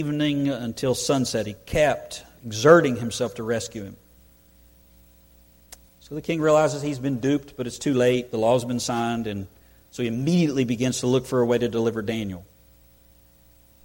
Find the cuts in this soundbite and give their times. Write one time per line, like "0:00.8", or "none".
0:02.4